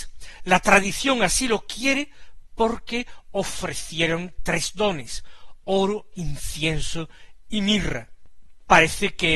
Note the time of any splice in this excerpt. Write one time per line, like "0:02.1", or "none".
none